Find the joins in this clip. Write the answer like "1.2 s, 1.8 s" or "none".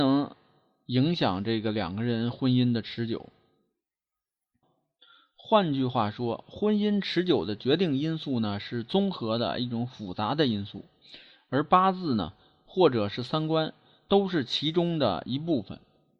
none